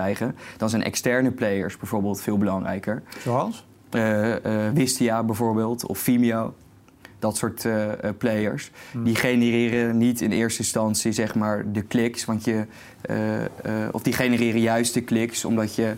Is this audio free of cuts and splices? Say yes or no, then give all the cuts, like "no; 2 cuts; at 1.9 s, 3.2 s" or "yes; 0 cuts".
yes; 0 cuts